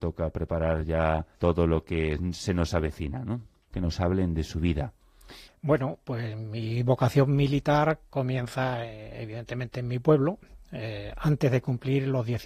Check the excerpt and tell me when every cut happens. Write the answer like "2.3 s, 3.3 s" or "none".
1.3 s, 3.7 s, 5.5 s